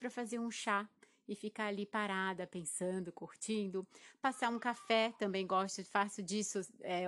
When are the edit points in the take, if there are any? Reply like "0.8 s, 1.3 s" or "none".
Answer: none

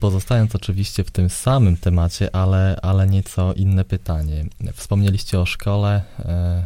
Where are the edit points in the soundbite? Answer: none

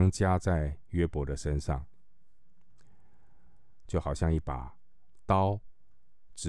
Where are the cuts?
3.9 s

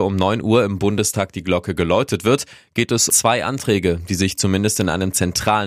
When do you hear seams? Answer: 3.1 s

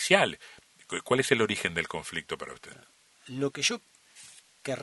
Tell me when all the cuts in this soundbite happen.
none

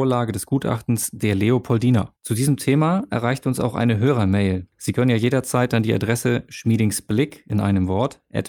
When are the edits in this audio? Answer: 2.1 s

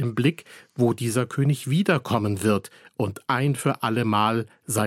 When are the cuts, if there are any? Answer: none

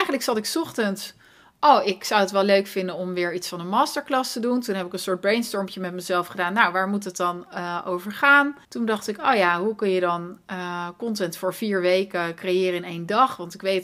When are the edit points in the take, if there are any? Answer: 8.6 s

